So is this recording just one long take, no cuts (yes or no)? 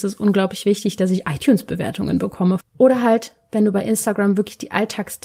no